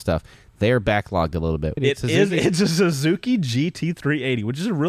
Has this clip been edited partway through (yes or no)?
yes